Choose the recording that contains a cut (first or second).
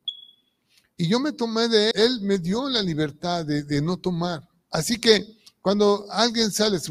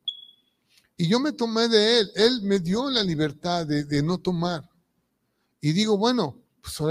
first